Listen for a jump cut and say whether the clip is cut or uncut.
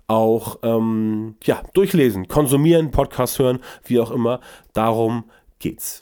cut